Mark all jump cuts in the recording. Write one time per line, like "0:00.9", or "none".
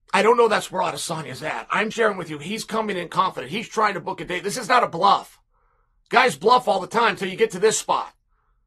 0:01.9